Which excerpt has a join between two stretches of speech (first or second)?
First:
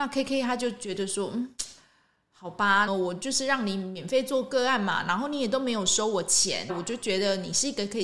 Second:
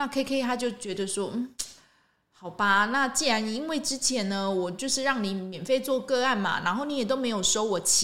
first